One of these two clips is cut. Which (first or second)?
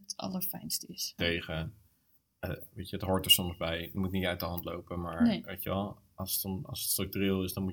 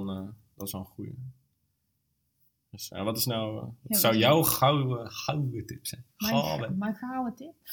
first